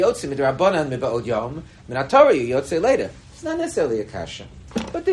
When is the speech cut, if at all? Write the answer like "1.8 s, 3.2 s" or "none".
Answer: none